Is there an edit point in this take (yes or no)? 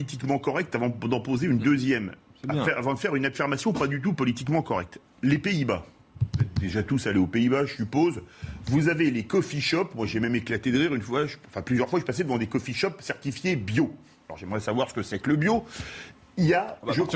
no